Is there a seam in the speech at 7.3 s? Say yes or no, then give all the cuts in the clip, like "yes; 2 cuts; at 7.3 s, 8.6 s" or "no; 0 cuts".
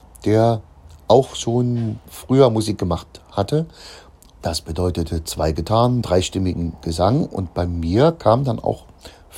no; 2 cuts; at 4.4 s, 6.0 s